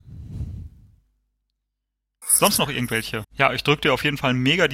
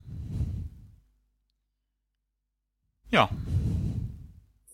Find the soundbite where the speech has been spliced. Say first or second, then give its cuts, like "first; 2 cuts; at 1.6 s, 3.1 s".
first; 2 cuts; at 2.2 s, 3.2 s